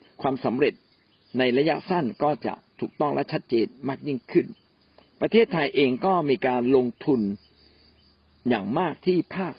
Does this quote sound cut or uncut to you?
uncut